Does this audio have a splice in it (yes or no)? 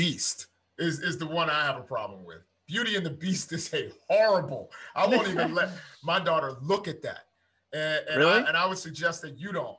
no